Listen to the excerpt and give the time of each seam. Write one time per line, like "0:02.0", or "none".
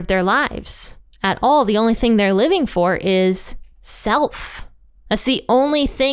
none